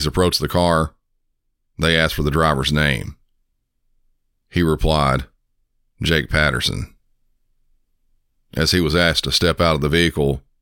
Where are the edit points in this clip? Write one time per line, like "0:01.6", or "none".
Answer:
none